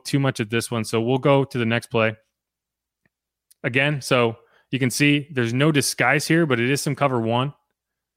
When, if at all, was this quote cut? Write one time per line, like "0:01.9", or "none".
none